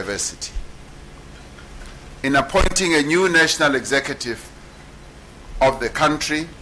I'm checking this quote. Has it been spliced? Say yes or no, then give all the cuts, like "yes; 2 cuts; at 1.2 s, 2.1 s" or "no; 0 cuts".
yes; 1 cut; at 2.2 s